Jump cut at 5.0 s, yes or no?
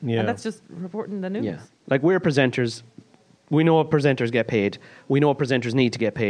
no